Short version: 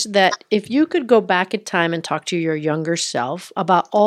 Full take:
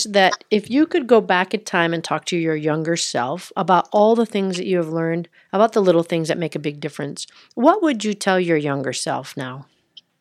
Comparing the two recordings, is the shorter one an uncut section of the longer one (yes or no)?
yes